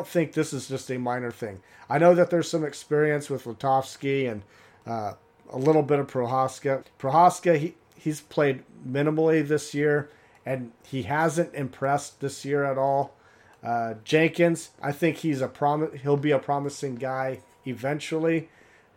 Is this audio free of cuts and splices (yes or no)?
no